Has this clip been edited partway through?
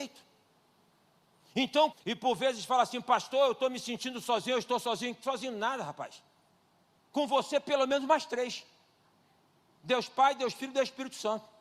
yes; 1 cut; at 1.9 s

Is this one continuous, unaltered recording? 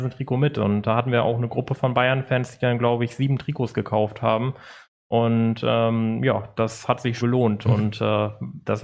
no; 1 cut; at 7.2 s

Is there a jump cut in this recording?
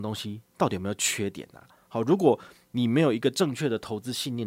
no; 0 cuts

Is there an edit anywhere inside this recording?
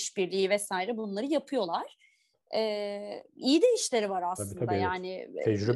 no; 0 cuts

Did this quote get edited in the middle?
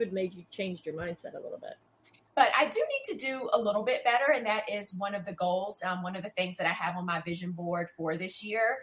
yes; 1 cut; at 2.3 s

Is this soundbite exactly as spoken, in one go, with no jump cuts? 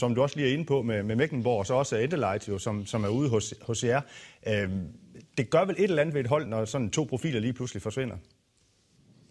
no; 1 cut; at 6.5 s

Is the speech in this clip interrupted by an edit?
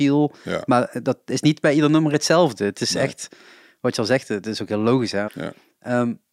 yes; 1 cut; at 5.3 s

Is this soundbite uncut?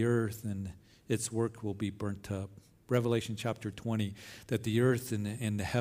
yes; 0 cuts

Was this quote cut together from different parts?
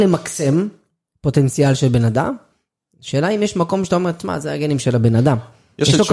no; 0 cuts

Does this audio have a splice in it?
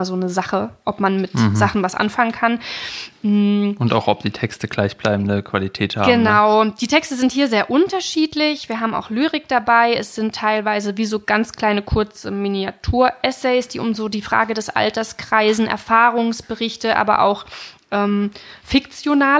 no; 0 cuts

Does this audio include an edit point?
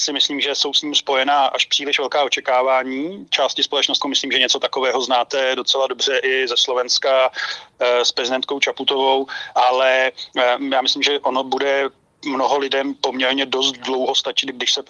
yes; 1 cut; at 4.0 s

